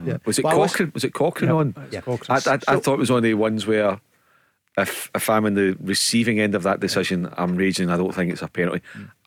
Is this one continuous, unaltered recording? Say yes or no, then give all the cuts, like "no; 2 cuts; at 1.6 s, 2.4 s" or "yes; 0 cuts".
no; 1 cut; at 5.1 s